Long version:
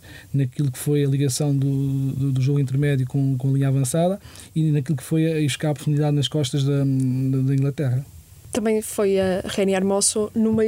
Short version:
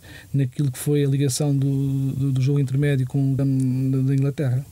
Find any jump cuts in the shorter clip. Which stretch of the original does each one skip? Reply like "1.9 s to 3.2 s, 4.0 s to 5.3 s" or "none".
3.4 s to 6.8 s